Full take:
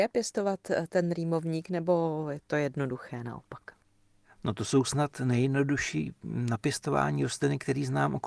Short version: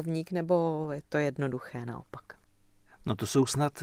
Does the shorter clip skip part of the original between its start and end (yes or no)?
no